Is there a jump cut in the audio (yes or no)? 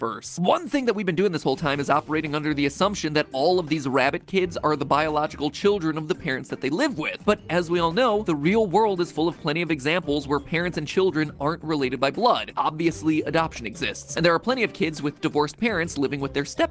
no